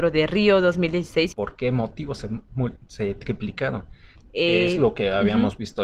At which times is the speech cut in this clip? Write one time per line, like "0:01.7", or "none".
0:01.3
0:04.2